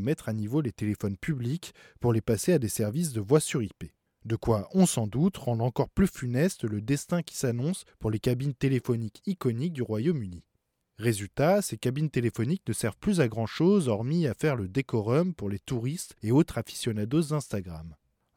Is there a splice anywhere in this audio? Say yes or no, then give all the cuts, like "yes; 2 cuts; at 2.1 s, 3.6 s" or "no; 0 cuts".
yes; 1 cut; at 10.8 s